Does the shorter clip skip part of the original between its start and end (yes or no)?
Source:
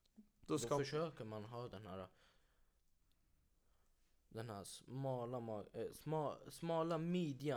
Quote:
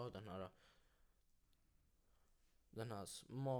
no